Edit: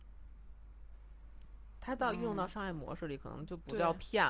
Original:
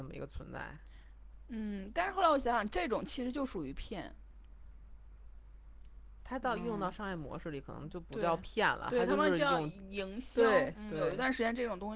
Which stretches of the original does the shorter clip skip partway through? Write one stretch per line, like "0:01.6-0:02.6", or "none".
none